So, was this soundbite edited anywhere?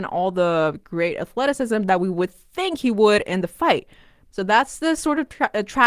yes; 1 cut; at 4.3 s

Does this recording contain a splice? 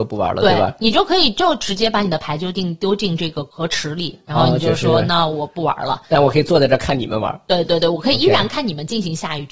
yes; 1 cut; at 7.7 s

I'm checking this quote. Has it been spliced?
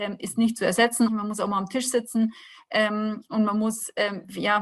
yes; 1 cut; at 1.1 s

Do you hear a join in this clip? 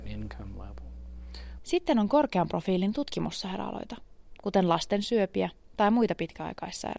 yes; 2 cuts; at 1.6 s, 4.4 s

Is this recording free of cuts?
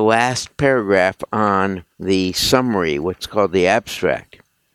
no; 1 cut; at 1.9 s

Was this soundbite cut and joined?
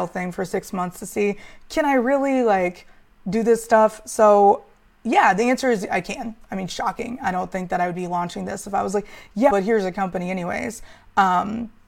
yes; 1 cut; at 9.5 s

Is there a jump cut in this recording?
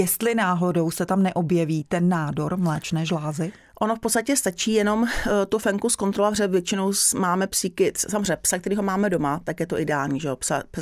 no; 0 cuts

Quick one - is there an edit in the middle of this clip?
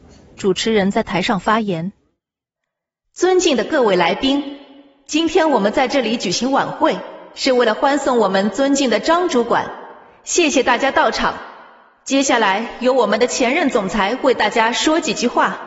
no; 0 cuts

